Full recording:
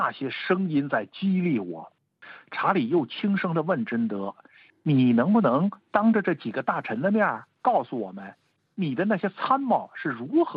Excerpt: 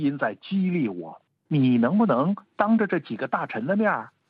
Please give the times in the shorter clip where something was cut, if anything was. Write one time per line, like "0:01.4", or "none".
0:01.5